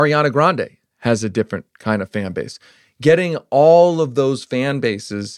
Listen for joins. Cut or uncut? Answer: uncut